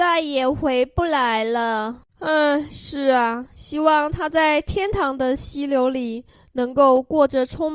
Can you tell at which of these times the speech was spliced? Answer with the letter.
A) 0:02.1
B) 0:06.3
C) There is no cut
A